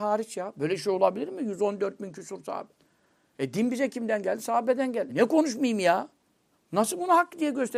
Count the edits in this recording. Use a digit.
2